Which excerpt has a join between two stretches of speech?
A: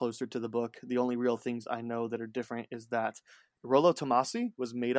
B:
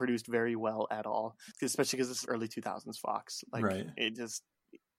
B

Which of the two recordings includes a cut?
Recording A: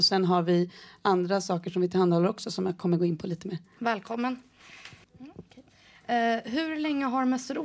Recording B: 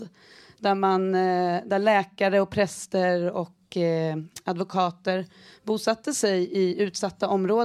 A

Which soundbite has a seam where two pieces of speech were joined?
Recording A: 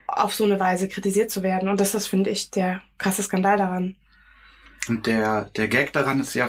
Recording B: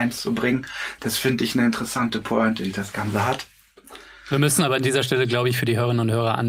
B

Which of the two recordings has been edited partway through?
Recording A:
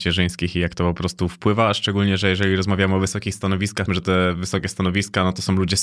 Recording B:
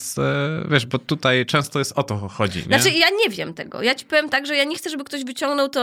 A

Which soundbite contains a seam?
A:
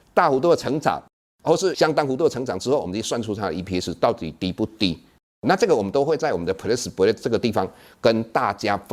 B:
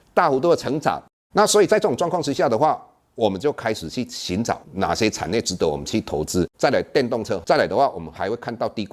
B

